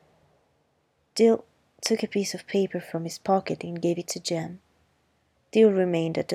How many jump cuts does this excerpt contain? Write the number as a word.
one